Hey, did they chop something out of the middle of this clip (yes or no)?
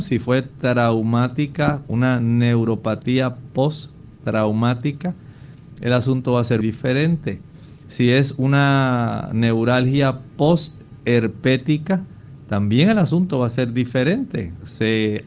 yes